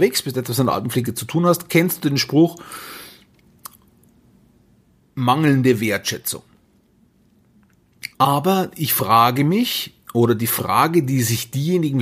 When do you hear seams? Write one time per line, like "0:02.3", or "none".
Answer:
0:08.1